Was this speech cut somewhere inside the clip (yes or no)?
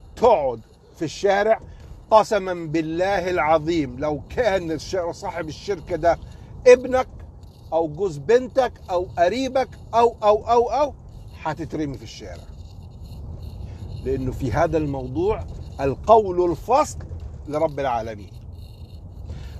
no